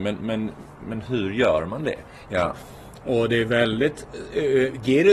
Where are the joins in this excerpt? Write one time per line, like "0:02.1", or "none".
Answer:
0:02.3